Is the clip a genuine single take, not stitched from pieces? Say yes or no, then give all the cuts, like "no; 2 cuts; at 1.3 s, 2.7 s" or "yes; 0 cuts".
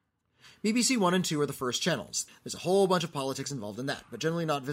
no; 1 cut; at 2.3 s